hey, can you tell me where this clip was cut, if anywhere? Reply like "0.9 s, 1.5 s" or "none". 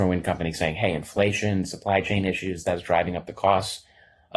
none